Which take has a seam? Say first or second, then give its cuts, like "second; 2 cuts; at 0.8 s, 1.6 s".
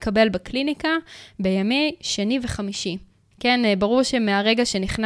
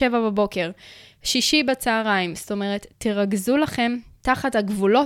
first; 1 cut; at 3.3 s